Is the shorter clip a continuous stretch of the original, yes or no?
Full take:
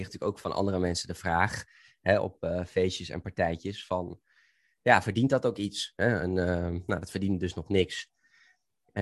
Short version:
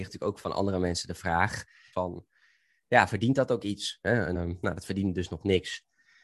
no